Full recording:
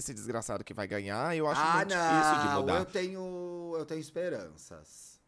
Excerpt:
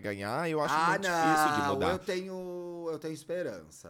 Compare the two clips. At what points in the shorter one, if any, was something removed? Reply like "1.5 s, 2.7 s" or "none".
none